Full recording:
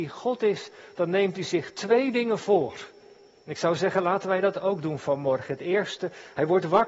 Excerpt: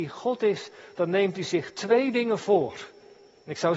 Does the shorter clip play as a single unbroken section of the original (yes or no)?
yes